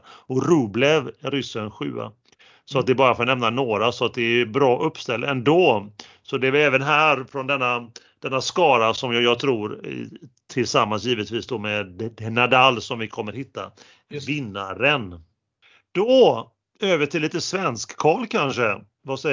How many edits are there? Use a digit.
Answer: 0